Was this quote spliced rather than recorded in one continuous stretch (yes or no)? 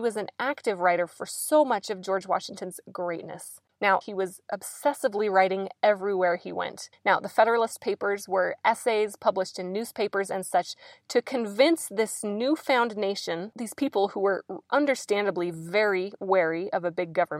yes